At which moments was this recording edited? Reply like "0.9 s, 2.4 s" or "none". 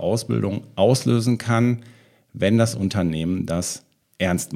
none